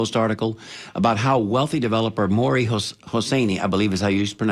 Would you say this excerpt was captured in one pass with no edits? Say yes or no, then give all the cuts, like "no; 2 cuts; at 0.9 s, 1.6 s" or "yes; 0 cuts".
yes; 0 cuts